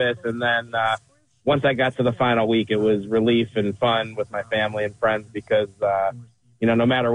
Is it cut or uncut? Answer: uncut